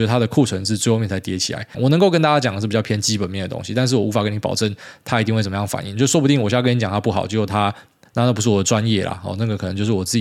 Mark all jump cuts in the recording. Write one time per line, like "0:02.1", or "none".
0:01.7
0:08.1